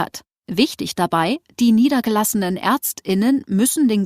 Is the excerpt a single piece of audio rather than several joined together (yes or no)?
yes